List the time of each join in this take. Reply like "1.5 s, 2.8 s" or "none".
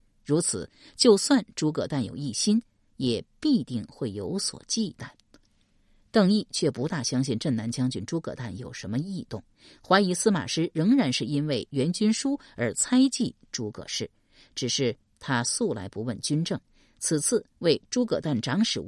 none